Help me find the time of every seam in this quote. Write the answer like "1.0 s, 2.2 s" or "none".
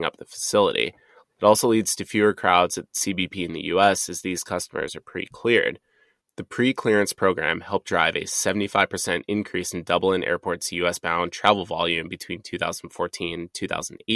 6.2 s